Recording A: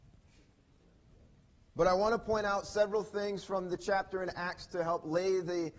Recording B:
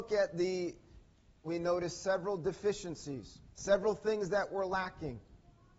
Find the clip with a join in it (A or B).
B